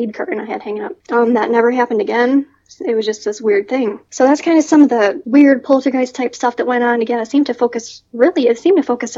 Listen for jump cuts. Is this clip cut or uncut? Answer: cut